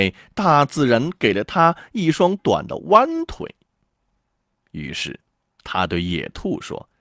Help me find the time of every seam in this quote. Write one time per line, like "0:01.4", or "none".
0:02.4